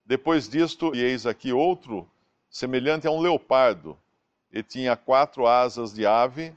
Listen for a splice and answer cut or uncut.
cut